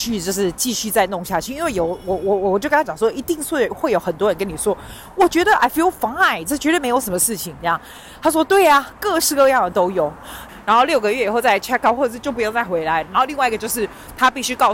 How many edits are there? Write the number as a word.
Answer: one